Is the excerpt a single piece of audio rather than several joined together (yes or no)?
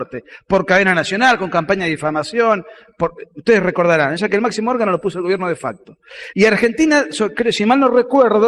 no